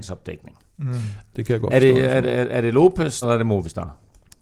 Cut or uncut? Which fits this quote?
cut